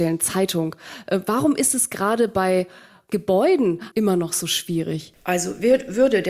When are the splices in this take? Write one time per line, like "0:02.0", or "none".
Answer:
0:03.9
0:05.2